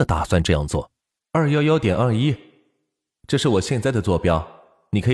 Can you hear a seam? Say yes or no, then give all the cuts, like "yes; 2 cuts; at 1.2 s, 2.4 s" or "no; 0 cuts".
yes; 1 cut; at 1.2 s